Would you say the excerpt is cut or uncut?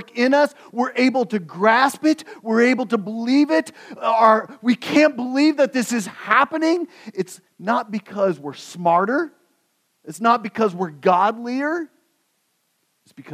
uncut